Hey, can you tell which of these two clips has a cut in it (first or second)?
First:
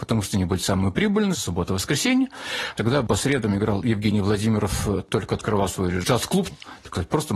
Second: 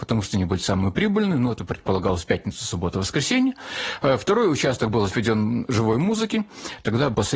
first